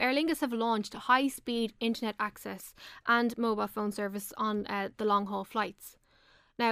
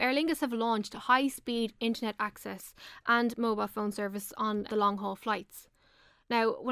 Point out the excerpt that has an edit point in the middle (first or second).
second